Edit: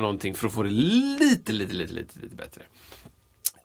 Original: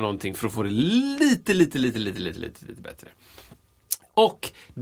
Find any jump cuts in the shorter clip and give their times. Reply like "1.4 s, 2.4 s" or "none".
1.5 s